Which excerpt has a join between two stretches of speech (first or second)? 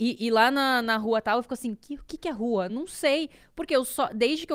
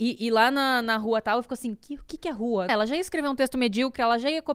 second